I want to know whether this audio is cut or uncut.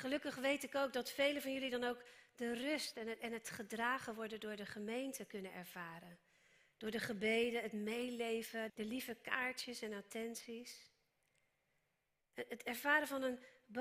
cut